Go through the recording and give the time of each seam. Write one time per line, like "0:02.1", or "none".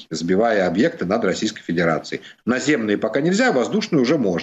0:02.4